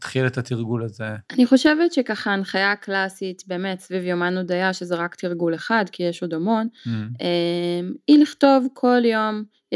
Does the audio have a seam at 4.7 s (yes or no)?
no